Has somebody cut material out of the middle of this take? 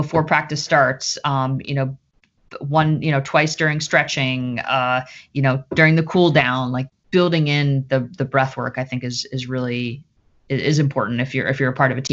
no; 0 cuts

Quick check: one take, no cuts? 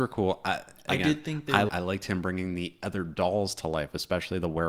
no; 1 cut; at 1.7 s

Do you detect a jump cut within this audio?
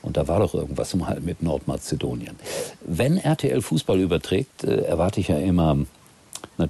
no; 0 cuts

